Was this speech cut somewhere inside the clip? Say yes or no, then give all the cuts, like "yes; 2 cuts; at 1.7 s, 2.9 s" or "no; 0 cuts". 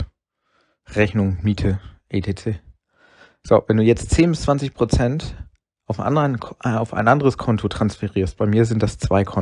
no; 0 cuts